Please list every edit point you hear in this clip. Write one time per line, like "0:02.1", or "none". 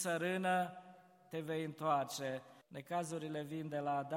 0:02.6